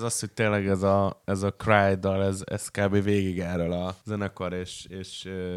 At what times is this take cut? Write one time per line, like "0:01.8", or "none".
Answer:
0:04.0